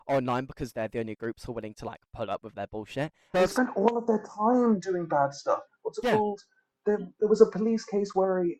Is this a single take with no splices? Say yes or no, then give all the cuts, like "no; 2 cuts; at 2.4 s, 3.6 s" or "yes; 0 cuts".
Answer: no; 2 cuts; at 3.3 s, 5.7 s